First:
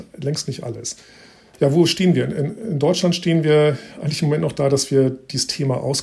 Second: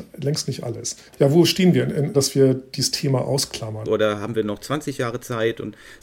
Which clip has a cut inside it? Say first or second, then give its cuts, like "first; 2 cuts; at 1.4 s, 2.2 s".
second; 3 cuts; at 1.1 s, 2.1 s, 3.8 s